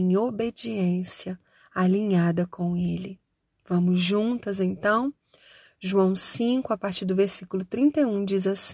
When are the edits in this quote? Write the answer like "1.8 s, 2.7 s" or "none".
none